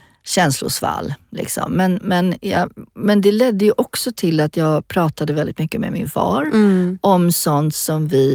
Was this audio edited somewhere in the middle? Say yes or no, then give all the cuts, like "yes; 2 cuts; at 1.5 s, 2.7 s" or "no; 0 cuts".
no; 0 cuts